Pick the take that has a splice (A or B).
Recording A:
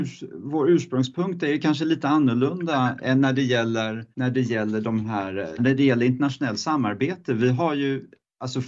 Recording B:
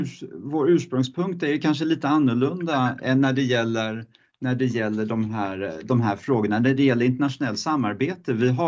A